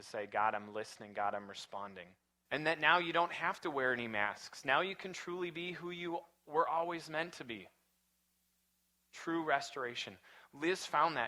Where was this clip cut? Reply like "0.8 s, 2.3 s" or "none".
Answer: 2.5 s